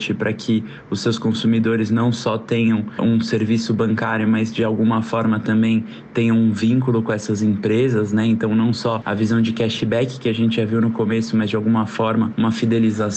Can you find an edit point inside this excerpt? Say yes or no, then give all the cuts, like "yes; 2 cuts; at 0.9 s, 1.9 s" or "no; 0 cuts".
no; 0 cuts